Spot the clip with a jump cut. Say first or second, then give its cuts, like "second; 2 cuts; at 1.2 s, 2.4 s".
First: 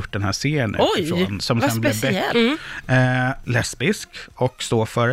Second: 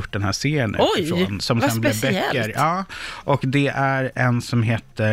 first; 2 cuts; at 2.3 s, 3.5 s